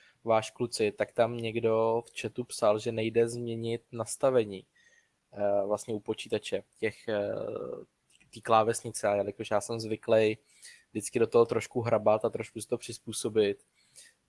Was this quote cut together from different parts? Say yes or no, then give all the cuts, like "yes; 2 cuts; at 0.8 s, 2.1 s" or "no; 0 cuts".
no; 0 cuts